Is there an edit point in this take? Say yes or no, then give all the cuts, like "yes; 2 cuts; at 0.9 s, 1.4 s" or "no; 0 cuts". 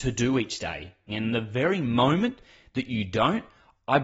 yes; 1 cut; at 1.1 s